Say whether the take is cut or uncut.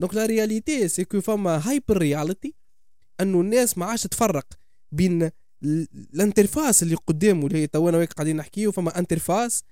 uncut